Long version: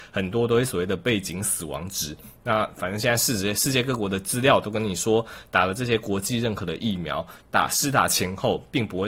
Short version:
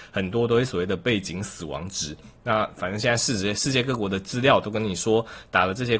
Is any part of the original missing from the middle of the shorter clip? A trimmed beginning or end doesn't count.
no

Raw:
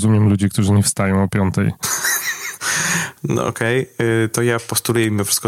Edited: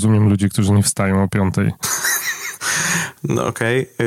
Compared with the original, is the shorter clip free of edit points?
yes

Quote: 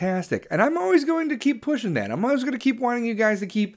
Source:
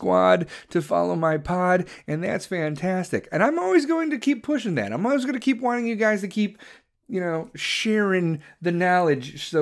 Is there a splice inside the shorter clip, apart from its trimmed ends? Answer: no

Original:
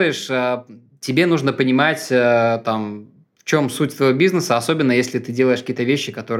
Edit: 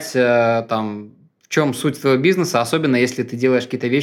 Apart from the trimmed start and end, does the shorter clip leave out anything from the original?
no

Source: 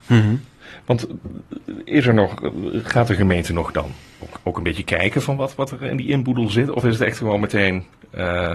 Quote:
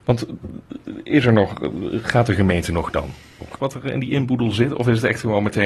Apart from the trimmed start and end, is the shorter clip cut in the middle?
yes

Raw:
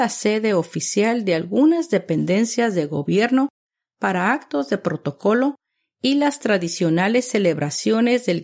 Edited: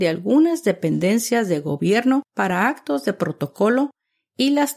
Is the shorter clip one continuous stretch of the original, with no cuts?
no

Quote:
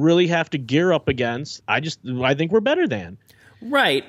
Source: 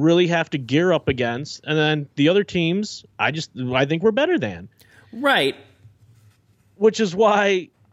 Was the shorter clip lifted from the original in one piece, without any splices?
no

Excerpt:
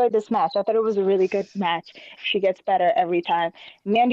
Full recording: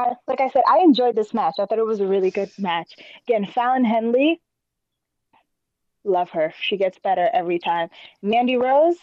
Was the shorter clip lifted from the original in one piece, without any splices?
no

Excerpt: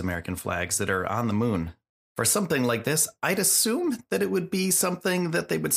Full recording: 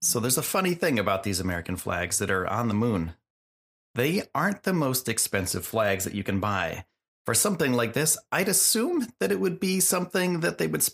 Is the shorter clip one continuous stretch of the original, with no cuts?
no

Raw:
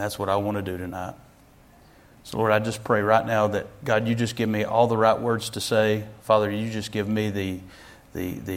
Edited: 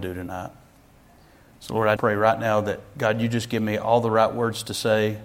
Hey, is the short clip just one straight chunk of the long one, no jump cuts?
no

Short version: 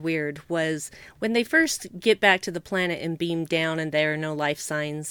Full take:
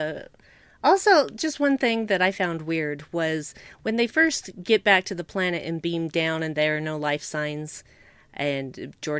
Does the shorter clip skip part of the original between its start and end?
no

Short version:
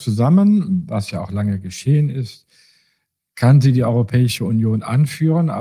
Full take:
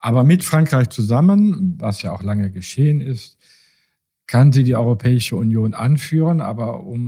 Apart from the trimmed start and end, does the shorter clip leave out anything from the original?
no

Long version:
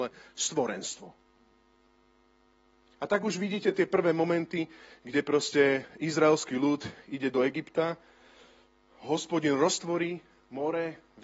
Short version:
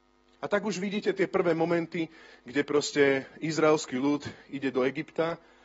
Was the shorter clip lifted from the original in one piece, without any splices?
yes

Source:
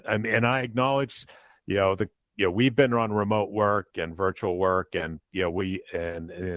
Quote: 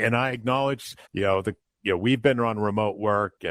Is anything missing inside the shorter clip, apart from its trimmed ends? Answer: yes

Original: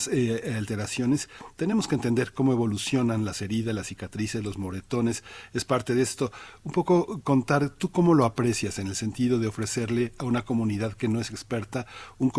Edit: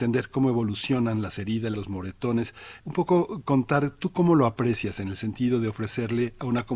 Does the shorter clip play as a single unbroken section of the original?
no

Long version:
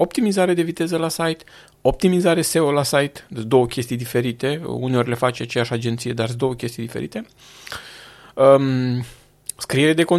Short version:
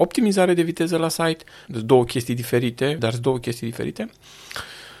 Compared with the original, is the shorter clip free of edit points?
no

